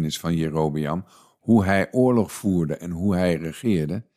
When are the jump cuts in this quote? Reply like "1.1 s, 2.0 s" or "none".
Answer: none